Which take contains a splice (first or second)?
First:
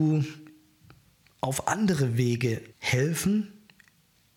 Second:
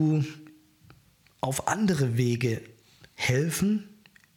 first